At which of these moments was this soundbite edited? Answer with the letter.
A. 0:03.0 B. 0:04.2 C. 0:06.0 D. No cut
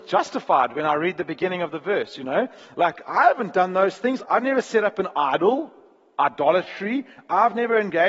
B